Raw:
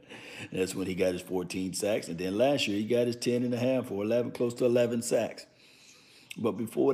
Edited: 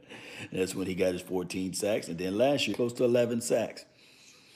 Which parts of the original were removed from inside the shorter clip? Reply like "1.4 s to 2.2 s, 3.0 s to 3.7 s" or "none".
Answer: 2.7 s to 4.3 s